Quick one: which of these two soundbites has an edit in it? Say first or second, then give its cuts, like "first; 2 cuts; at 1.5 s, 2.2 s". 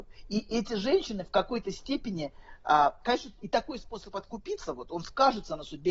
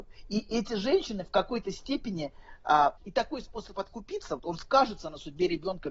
second; 2 cuts; at 3.0 s, 4.4 s